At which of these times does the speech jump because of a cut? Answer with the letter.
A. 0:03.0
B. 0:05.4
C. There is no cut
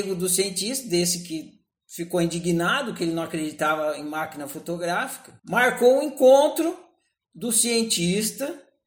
B